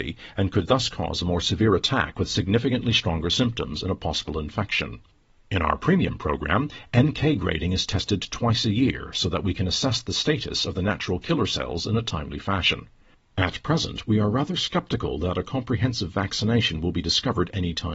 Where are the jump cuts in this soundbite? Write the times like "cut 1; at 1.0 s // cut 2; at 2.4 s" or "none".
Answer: none